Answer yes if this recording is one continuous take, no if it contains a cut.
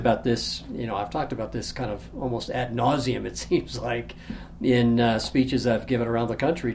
yes